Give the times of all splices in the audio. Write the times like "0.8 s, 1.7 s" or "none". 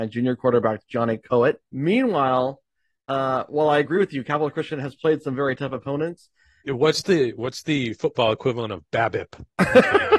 1.6 s, 6.7 s